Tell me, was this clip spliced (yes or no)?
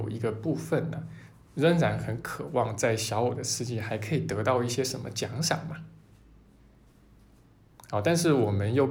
no